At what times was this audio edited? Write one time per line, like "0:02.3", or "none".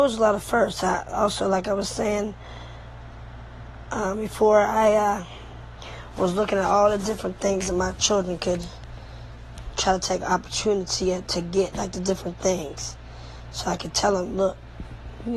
none